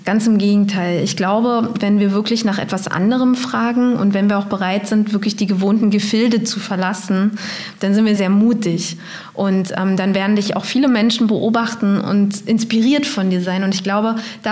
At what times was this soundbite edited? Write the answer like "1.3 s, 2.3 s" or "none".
8.2 s